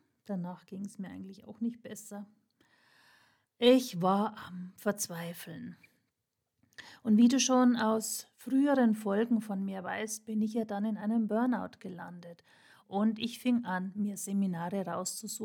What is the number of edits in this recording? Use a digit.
1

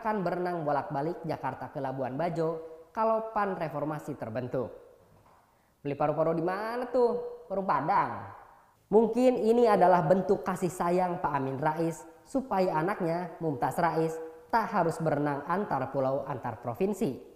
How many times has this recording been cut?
0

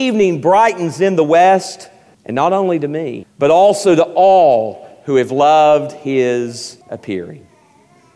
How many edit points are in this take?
3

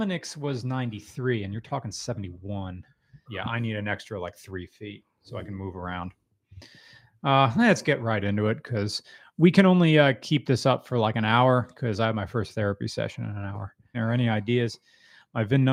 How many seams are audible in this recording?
2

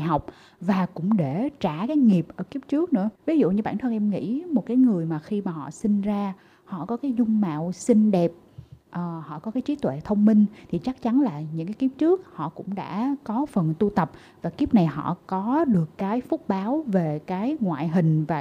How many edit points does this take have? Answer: 1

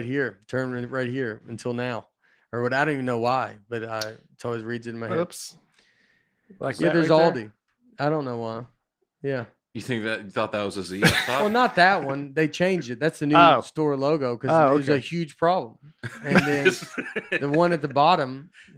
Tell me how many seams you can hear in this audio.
0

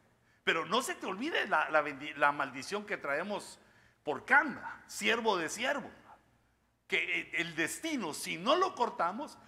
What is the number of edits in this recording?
0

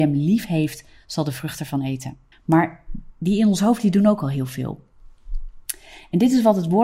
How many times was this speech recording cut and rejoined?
1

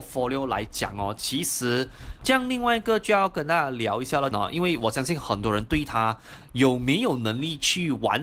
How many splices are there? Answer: 2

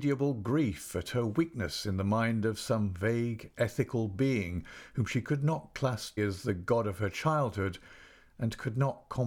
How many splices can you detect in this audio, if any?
1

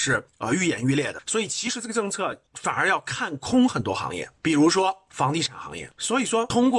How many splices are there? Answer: 0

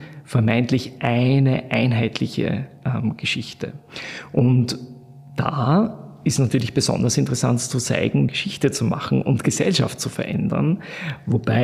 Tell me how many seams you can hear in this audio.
1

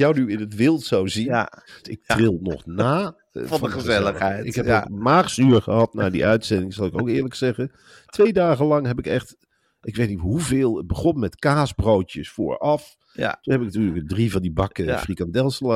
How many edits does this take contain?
1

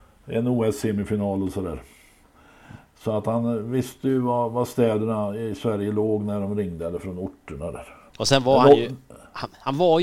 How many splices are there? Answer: 0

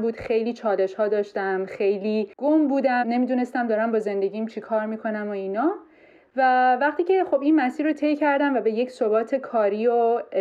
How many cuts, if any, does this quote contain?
1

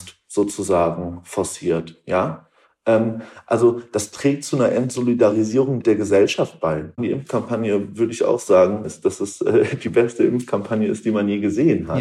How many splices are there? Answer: 2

